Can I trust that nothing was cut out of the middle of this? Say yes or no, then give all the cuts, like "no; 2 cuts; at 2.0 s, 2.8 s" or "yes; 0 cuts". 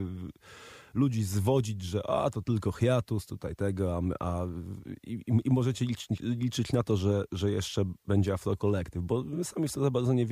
yes; 0 cuts